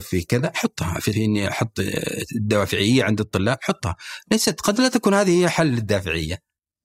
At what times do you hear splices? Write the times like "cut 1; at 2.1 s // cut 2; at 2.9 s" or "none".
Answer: cut 1; at 1.1 s